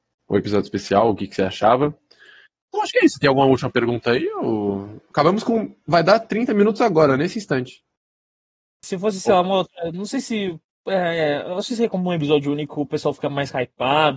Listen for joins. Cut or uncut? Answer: cut